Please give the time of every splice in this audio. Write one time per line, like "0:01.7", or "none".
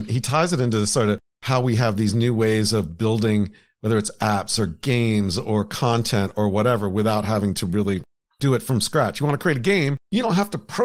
none